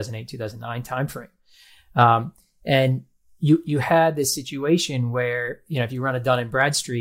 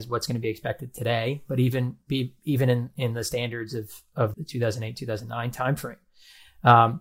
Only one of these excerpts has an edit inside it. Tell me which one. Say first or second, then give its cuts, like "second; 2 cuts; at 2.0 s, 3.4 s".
second; 1 cut; at 4.3 s